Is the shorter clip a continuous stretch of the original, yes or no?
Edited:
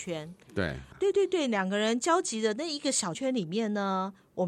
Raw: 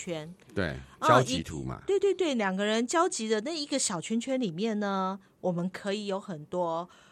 no